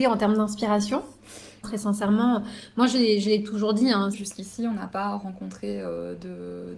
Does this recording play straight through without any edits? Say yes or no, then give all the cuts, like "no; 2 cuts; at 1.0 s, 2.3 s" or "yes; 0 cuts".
no; 2 cuts; at 1.6 s, 4.1 s